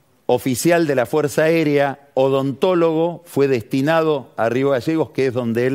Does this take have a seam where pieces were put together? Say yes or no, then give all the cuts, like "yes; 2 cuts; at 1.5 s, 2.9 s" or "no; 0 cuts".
no; 0 cuts